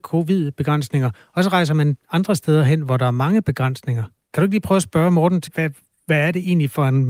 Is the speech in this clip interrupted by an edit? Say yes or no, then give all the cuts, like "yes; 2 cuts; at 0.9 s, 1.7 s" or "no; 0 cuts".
yes; 1 cut; at 5.5 s